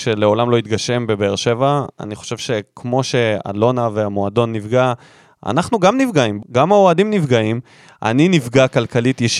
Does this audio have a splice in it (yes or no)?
yes